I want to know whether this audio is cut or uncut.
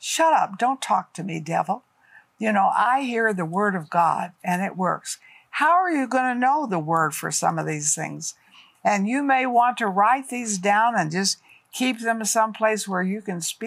uncut